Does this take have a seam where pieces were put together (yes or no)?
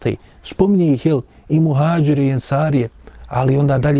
no